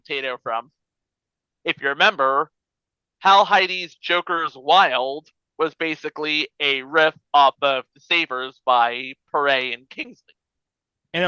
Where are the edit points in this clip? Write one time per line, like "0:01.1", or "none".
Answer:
0:01.5